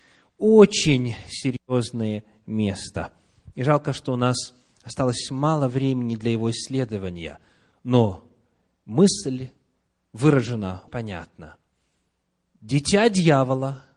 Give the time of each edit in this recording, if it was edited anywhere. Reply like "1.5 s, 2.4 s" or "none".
10.9 s